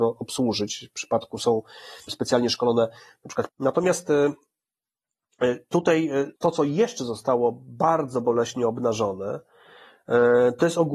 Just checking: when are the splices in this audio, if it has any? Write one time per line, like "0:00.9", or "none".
0:02.1
0:03.5
0:06.4